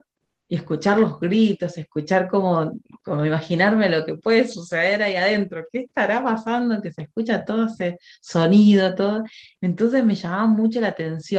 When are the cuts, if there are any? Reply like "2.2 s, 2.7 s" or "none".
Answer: 9.6 s